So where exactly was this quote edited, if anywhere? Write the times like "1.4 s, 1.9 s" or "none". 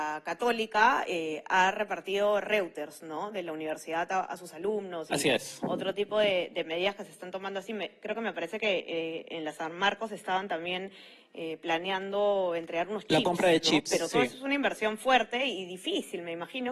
none